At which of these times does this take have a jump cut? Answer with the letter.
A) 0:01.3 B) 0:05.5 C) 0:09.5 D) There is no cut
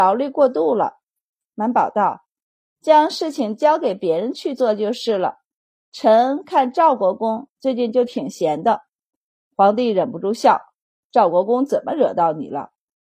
A